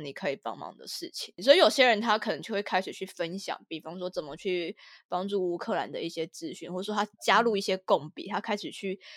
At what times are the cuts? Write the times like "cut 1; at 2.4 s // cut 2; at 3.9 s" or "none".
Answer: none